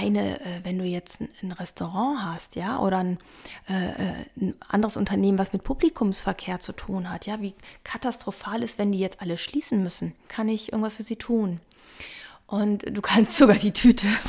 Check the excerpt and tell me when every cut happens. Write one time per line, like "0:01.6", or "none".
0:10.3

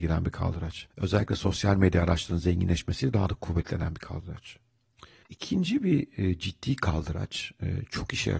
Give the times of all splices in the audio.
0:00.9
0:05.2

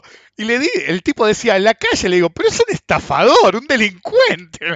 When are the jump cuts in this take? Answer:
none

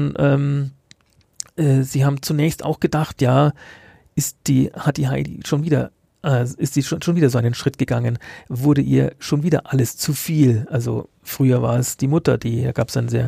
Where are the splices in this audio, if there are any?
none

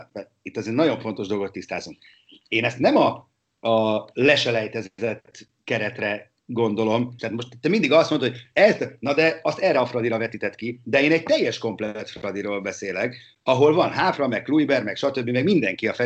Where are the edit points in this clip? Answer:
0:07.2

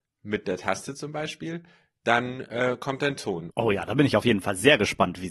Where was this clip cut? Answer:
0:03.5

